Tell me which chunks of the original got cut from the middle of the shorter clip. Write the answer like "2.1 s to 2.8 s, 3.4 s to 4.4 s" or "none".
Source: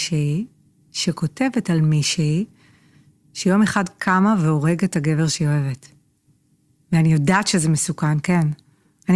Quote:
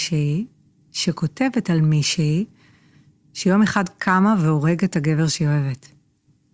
none